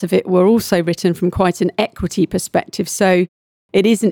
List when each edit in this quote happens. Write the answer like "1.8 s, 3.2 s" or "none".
none

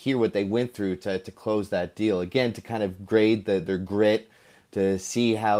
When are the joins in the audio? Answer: none

